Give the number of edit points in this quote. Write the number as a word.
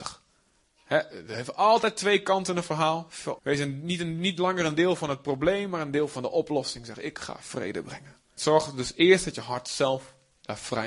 two